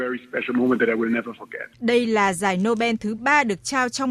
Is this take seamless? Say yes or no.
no